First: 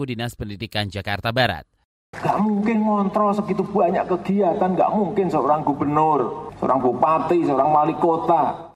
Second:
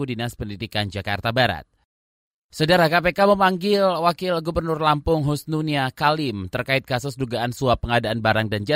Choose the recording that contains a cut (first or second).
first